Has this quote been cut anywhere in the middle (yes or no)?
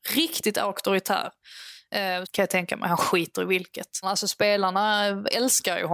yes